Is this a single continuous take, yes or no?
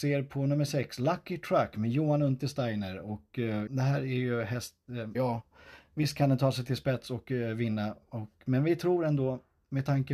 no